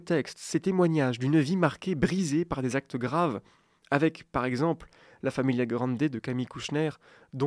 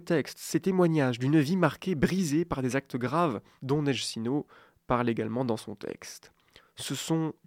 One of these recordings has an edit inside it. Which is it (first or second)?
second